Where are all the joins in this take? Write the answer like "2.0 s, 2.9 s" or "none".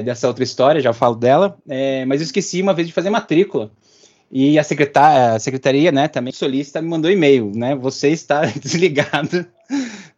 6.3 s